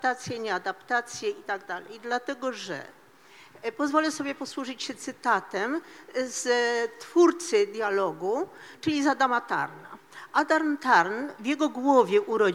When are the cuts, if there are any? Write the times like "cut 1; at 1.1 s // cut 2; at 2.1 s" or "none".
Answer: none

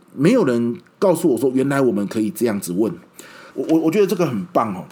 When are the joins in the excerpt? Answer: cut 1; at 3.5 s

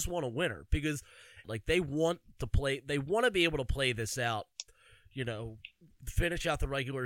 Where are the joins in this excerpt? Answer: cut 1; at 1.4 s

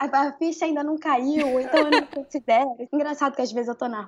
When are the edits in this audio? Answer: cut 1; at 2.9 s

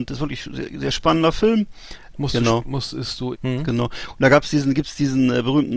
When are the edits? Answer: cut 1; at 2.1 s // cut 2; at 3.3 s

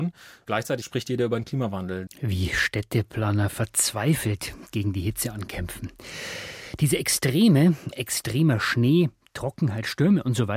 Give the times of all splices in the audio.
cut 1; at 2.1 s // cut 2; at 7.9 s

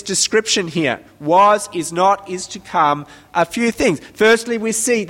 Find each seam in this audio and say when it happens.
none

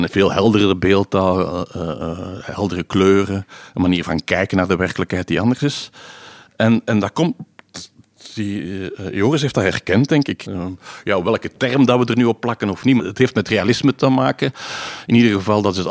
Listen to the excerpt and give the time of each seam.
cut 1; at 10.4 s // cut 2; at 13.0 s

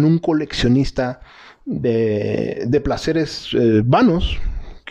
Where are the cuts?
none

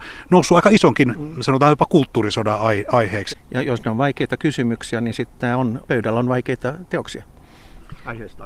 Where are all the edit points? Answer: cut 1; at 3.3 s // cut 2; at 5.8 s

